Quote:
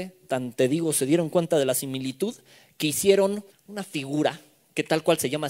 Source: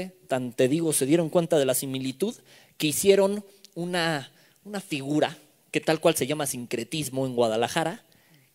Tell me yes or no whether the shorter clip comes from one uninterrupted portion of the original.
no